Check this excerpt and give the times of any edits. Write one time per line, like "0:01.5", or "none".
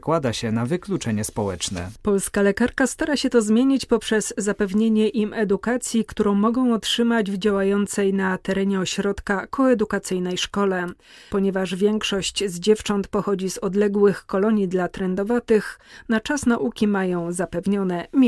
none

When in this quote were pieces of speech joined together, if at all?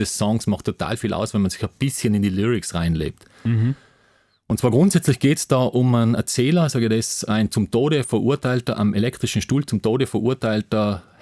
none

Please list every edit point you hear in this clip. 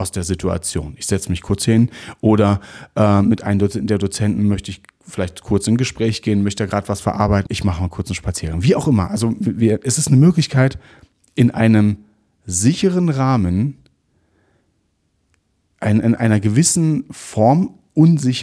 0:07.5

